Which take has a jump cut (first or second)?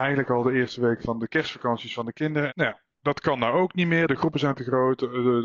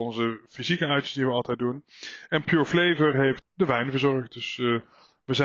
first